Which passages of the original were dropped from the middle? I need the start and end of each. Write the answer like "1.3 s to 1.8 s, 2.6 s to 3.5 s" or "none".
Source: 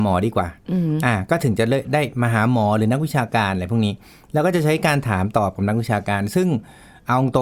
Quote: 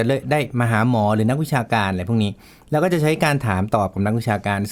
none

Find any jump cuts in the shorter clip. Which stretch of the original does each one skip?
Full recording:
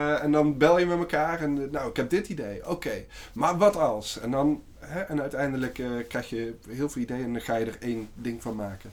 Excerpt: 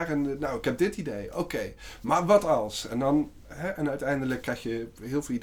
5.7 s to 6.1 s

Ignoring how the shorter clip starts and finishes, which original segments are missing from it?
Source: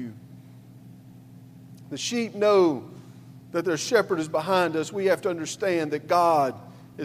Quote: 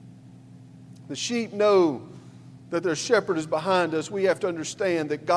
none

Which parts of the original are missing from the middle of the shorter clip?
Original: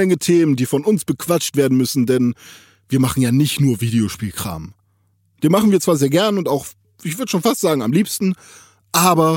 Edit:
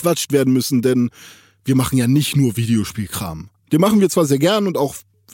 4.8 s to 5.3 s

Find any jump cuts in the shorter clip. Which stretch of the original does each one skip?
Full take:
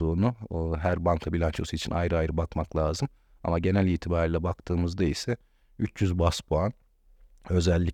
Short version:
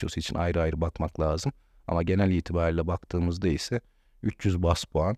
none

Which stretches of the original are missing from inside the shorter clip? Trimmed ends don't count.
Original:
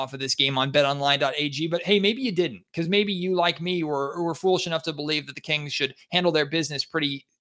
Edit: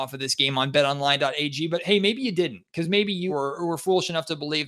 3.3 s to 3.9 s

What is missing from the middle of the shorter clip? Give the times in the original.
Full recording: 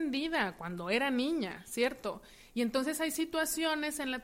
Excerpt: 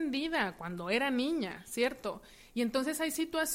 none

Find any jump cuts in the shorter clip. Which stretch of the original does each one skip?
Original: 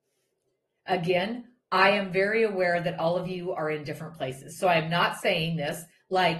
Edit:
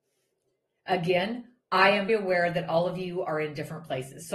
2.1 s to 2.4 s

